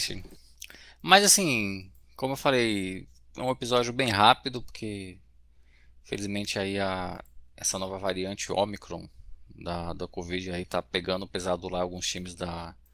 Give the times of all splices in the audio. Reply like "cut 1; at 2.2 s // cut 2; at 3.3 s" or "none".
none